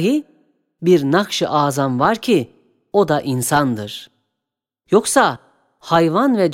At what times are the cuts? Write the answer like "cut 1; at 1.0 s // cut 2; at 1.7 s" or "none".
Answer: cut 1; at 4.8 s